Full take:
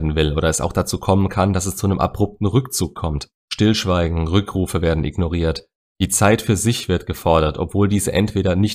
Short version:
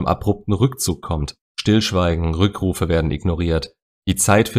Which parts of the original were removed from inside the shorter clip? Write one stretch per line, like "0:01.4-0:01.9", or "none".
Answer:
none